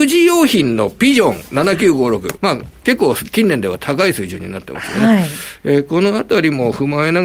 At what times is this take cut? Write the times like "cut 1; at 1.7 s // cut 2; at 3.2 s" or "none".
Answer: cut 1; at 2.4 s

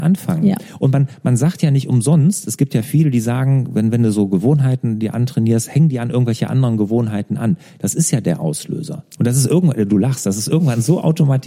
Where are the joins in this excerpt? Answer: cut 1; at 9.2 s

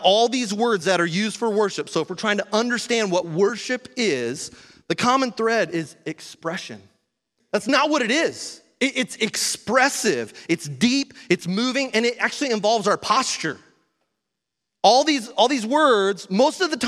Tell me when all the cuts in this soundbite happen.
cut 1; at 7.4 s

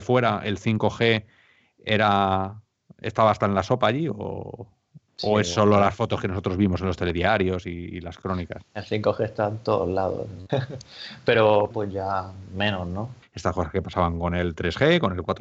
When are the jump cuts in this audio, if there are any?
cut 1; at 10.5 s // cut 2; at 11.7 s // cut 3; at 13.2 s

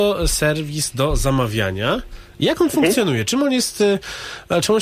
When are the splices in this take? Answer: none

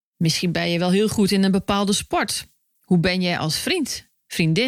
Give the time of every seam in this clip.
none

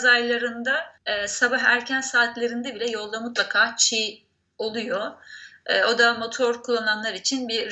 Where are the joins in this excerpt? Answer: cut 1; at 1.0 s

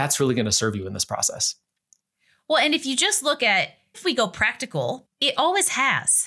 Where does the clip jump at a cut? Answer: cut 1; at 3.9 s // cut 2; at 5.0 s

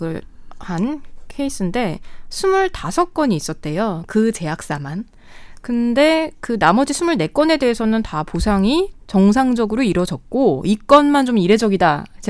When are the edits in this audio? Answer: none

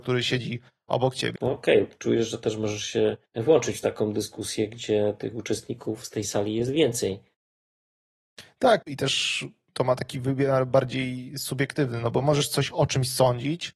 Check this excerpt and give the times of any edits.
cut 1; at 1.4 s // cut 2; at 3.3 s // cut 3; at 8.8 s

